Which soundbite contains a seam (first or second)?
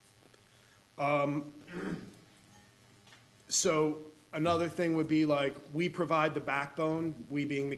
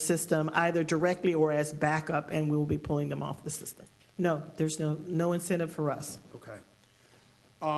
second